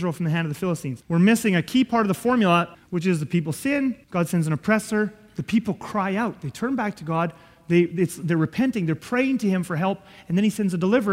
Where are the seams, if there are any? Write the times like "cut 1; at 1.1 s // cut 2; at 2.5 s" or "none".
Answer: cut 1; at 1.0 s // cut 2; at 2.7 s // cut 3; at 4.0 s